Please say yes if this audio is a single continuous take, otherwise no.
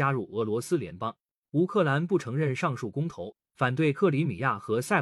yes